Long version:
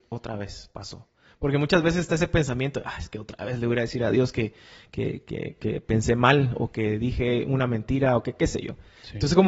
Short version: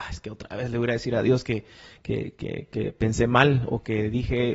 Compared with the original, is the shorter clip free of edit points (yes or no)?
yes